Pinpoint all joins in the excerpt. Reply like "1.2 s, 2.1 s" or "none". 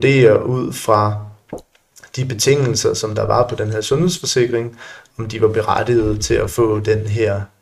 none

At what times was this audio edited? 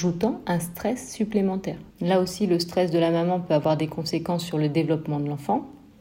1.9 s

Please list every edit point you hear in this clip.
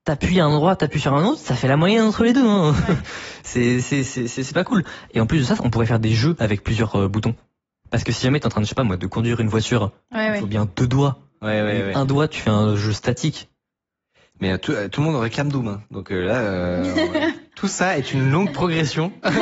none

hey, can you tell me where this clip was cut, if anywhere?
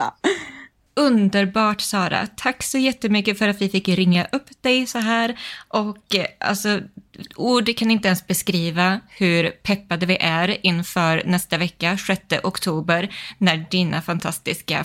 none

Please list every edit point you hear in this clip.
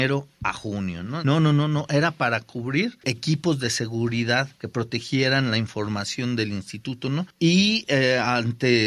1.2 s

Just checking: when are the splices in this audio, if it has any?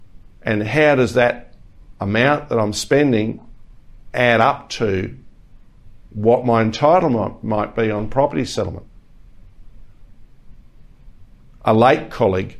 none

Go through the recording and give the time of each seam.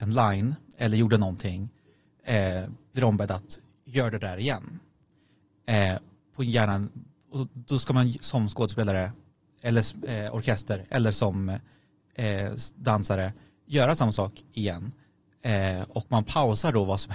none

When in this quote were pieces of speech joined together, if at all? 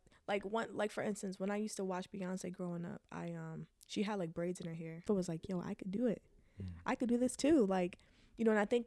5.1 s

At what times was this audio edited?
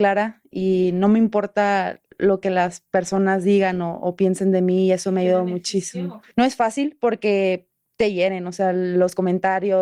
none

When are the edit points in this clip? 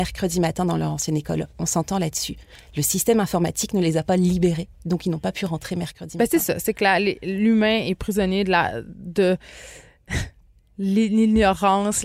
none

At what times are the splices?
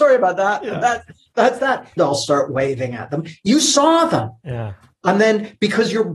2.0 s

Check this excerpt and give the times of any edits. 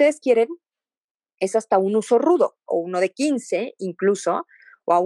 2.7 s

